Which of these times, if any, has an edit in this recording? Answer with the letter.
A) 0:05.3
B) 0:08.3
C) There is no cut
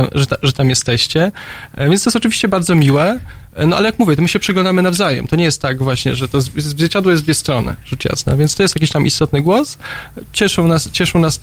C